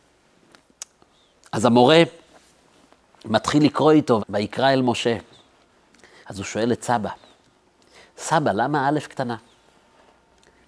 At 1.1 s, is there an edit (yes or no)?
no